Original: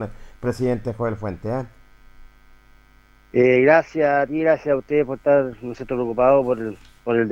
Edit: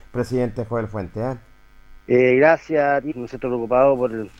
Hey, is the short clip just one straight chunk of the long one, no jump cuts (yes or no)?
no